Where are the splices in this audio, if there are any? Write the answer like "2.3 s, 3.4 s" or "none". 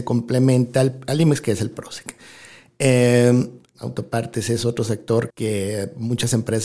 3.7 s, 5.3 s